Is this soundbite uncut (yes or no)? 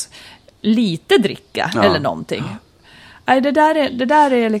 yes